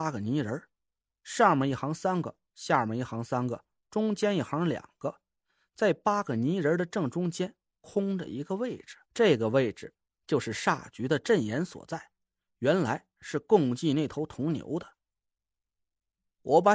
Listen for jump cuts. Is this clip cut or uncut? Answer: cut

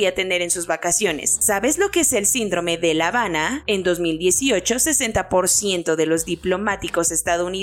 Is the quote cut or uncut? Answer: cut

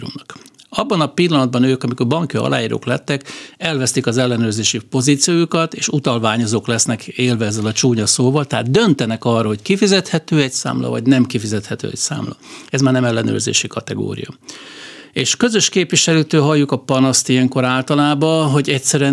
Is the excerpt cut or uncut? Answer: uncut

